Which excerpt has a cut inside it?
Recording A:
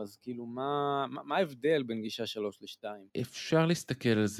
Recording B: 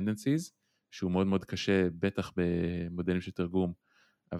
A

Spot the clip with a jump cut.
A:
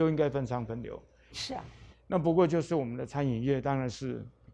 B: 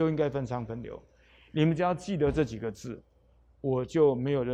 A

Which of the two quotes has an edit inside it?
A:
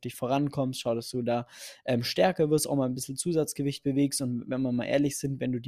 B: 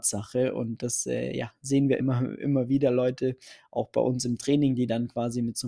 B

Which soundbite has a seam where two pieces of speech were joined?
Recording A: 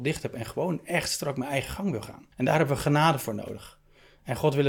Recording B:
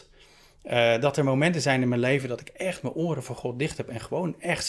A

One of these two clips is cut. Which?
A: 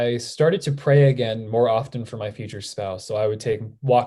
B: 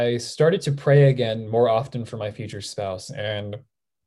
B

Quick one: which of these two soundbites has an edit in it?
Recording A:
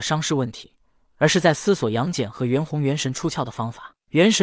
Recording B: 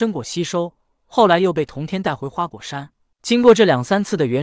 B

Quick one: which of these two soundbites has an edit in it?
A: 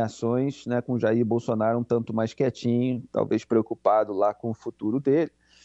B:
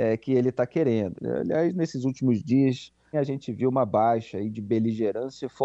B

